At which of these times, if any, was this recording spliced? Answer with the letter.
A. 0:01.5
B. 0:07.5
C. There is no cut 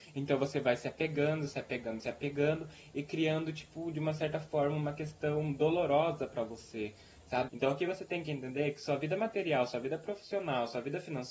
B